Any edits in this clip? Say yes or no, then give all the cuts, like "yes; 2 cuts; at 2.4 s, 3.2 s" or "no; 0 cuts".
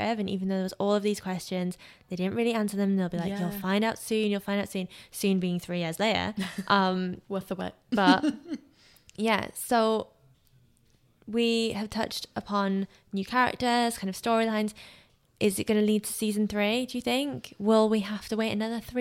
no; 0 cuts